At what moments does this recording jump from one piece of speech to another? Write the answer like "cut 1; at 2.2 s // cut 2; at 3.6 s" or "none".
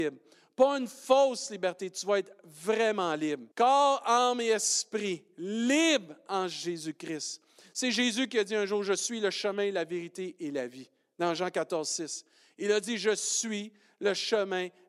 cut 1; at 3.5 s